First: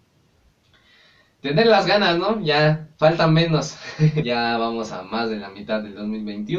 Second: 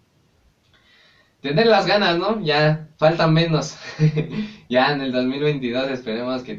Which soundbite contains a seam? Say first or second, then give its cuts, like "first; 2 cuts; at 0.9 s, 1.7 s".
first; 1 cut; at 4.2 s